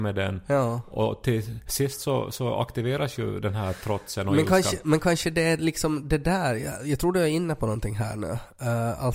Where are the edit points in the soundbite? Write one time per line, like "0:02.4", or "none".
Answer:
none